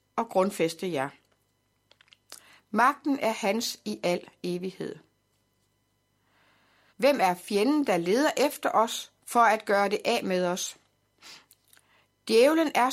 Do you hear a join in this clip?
yes; 2 cuts; at 6.9 s, 9.2 s

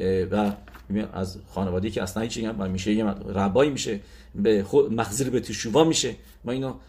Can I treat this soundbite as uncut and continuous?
yes; 0 cuts

